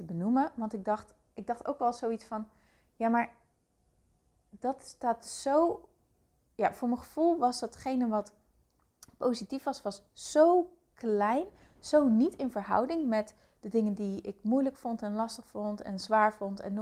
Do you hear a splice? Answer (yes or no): no